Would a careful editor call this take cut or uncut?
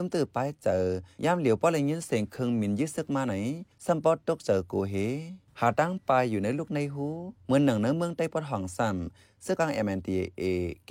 cut